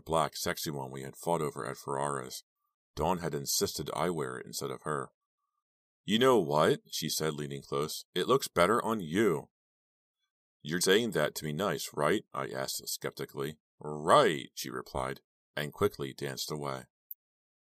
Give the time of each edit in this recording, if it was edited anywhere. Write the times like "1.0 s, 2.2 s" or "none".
10.8 s